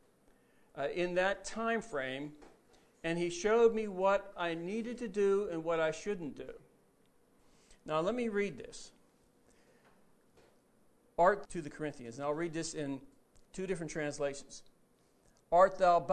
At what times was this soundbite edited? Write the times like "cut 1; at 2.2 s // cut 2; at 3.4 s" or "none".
cut 1; at 11.4 s